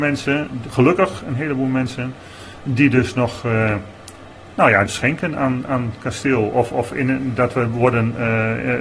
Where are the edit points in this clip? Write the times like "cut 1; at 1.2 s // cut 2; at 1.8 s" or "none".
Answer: cut 1; at 4.9 s